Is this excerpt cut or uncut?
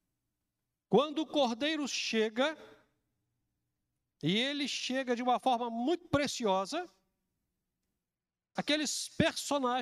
cut